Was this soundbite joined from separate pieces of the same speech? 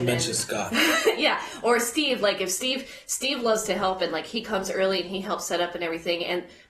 no; 0 cuts

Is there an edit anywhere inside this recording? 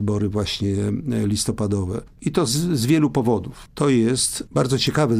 yes; 2 cuts; at 2.2 s, 3.7 s

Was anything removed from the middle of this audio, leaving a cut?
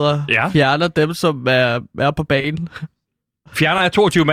no; 0 cuts

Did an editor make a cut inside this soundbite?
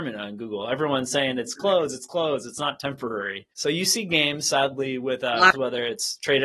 yes; 2 cuts; at 3.5 s, 5.5 s

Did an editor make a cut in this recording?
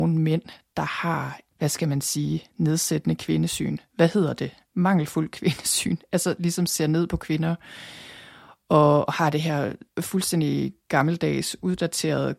no; 0 cuts

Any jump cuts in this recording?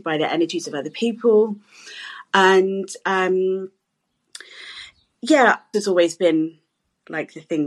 yes; 1 cut; at 5.7 s

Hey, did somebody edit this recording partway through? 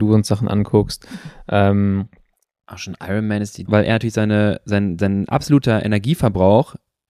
yes; 1 cut; at 3.7 s

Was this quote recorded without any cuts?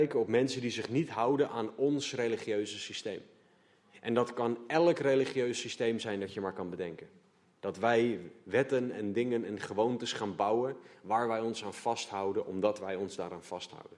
no; 1 cut; at 7.6 s

